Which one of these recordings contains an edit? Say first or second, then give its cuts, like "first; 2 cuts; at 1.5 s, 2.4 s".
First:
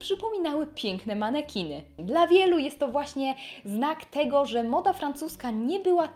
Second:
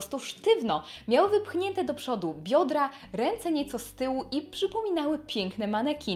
first; 1 cut; at 2.0 s